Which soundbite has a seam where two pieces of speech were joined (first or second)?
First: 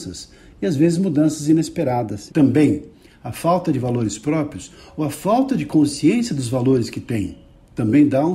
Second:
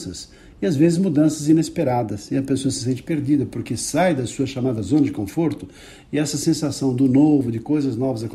first